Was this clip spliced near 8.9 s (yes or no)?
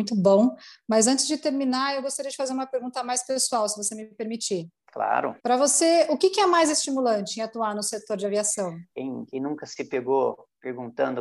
yes